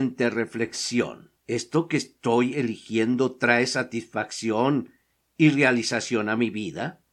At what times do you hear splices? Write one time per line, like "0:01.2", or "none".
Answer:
0:01.4